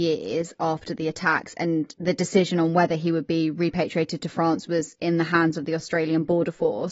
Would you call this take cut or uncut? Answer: uncut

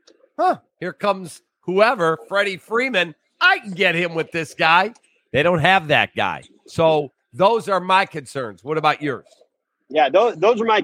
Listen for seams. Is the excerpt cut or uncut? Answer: uncut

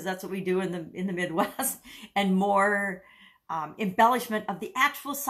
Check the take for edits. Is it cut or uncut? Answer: uncut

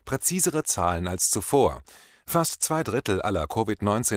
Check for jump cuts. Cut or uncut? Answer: uncut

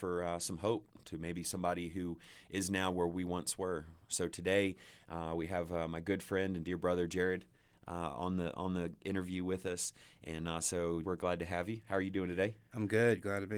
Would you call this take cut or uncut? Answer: cut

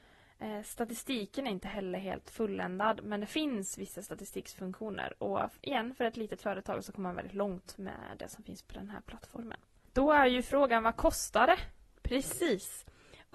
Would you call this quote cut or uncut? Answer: uncut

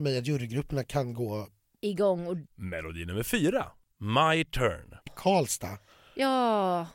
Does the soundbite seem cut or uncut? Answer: cut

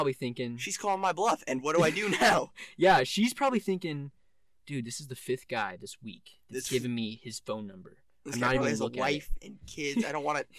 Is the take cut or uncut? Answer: uncut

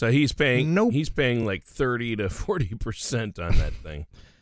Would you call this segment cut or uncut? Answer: uncut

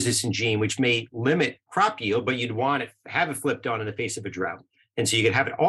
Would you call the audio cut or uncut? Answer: uncut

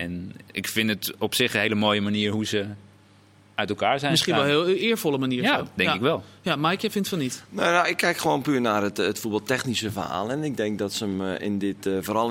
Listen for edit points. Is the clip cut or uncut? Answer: uncut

